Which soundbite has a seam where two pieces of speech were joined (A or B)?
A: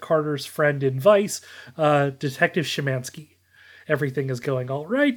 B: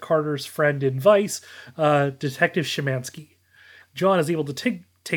B